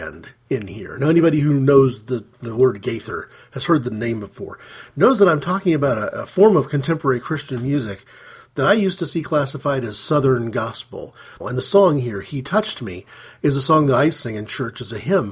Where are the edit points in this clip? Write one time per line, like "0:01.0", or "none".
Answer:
0:11.4